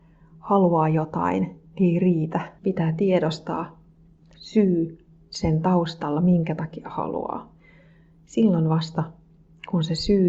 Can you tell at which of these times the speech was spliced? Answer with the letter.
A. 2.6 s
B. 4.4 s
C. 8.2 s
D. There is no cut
A